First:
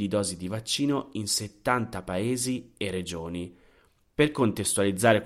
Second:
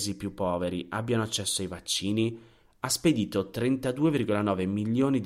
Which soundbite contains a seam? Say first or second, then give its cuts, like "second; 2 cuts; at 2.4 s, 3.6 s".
first; 1 cut; at 4.0 s